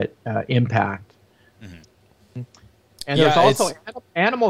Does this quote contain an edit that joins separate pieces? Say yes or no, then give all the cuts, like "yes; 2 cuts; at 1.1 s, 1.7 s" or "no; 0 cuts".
yes; 1 cut; at 1.8 s